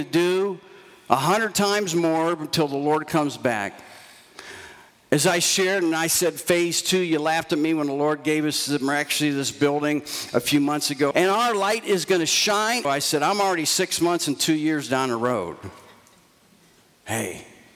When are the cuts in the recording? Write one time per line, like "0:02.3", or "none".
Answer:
0:11.1
0:12.8